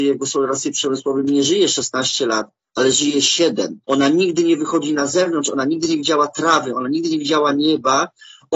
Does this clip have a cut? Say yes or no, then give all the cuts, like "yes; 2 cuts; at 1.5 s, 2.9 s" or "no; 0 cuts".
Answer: yes; 1 cut; at 3.8 s